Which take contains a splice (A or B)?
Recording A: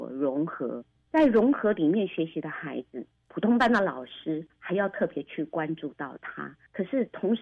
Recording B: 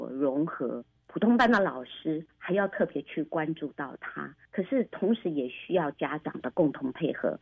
B